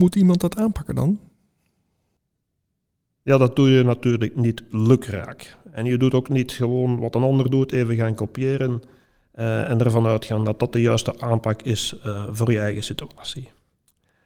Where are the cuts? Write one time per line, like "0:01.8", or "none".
none